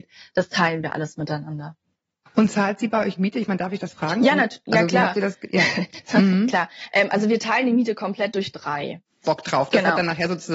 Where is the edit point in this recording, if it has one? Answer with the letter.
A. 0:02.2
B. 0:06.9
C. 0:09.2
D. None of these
C